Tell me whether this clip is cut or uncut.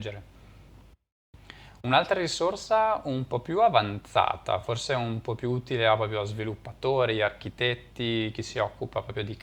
uncut